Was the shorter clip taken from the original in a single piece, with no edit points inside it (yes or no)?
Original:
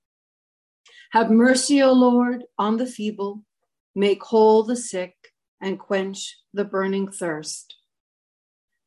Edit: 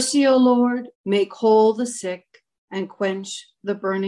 no